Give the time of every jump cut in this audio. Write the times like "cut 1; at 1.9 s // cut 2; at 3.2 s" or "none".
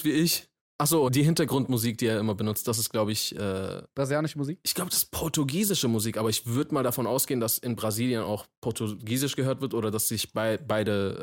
cut 1; at 1.1 s

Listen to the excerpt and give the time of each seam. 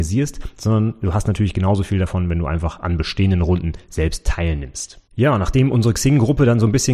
cut 1; at 5.1 s

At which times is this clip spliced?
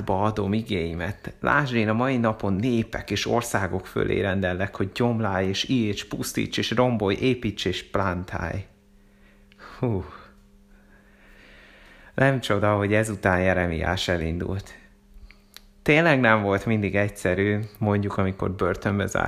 none

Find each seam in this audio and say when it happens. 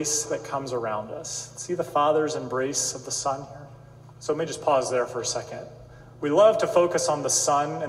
cut 1; at 4.1 s

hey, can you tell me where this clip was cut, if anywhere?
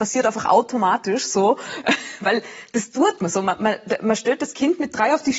none

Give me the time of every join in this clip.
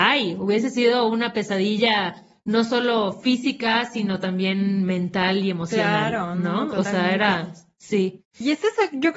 none

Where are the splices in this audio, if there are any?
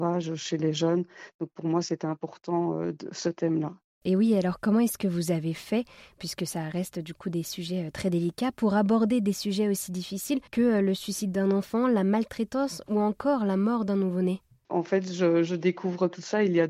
cut 1; at 10.5 s

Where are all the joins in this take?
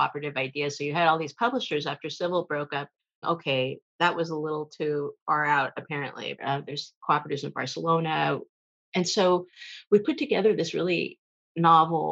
cut 1; at 3.2 s // cut 2; at 6.4 s

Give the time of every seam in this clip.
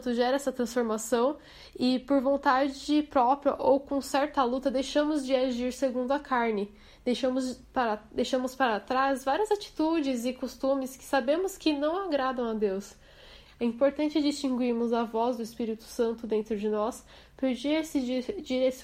cut 1; at 13.5 s

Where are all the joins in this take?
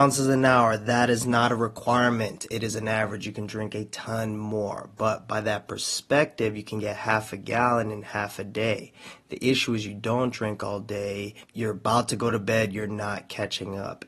none

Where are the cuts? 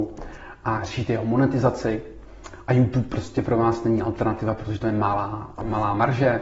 none

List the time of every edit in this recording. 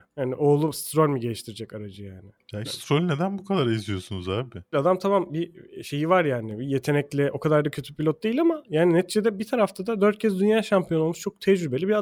cut 1; at 2.6 s // cut 2; at 4.7 s

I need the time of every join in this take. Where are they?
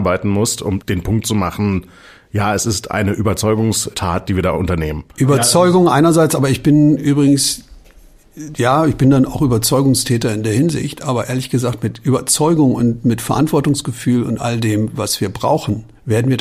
none

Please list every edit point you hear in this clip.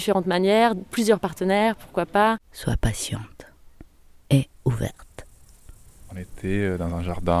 none

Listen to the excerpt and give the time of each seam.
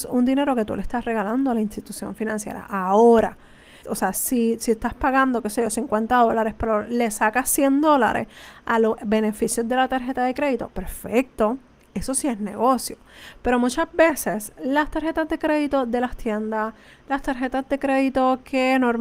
cut 1; at 3.8 s

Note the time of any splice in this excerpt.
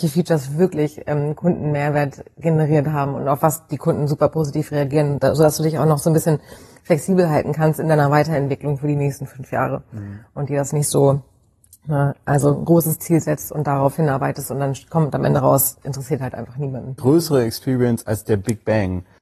cut 1; at 17.0 s

